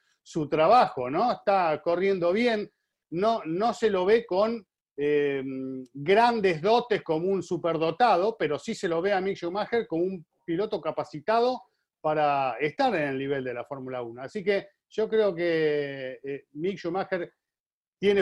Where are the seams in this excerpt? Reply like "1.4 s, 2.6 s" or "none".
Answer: none